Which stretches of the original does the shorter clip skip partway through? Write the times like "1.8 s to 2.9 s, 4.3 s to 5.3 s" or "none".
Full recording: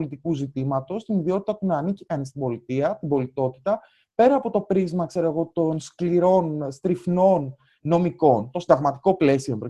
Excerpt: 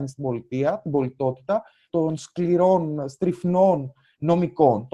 4.1 s to 5.5 s